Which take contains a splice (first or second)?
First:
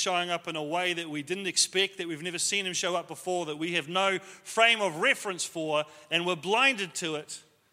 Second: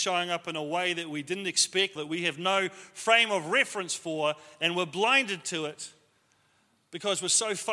second